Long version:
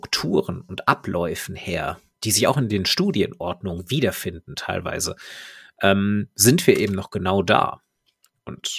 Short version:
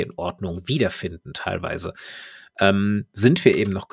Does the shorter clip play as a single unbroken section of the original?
yes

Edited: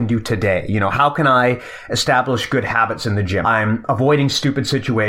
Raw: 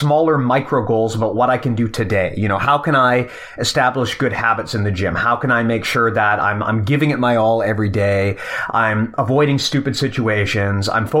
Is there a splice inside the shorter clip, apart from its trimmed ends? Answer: yes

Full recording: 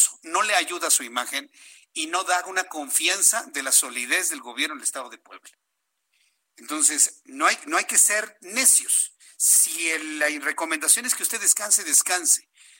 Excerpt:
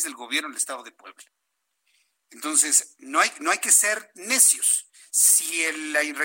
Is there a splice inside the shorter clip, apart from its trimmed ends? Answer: no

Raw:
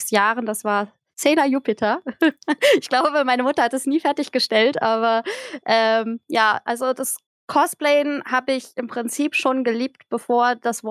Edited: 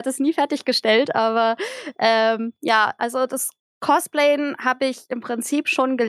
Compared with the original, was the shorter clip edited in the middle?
no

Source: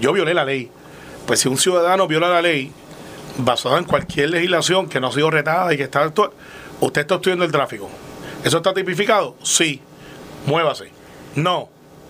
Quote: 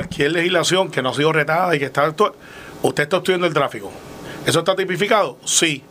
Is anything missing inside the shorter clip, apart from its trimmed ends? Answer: no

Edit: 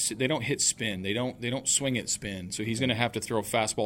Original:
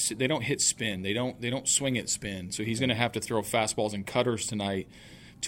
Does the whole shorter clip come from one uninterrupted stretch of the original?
yes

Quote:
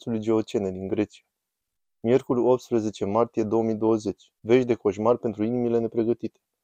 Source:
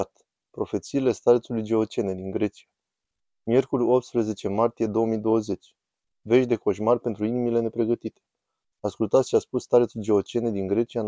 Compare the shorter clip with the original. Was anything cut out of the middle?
yes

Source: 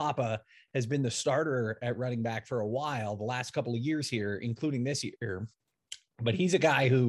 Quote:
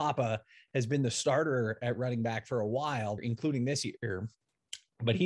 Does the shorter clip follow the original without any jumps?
no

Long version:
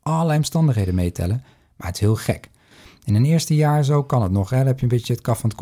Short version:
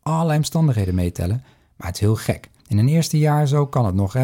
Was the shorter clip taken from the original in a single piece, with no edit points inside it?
no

